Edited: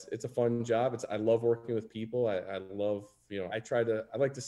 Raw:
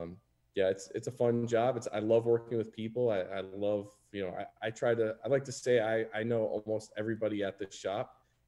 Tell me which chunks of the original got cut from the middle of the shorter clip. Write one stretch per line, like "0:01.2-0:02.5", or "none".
0:04.3-0:04.6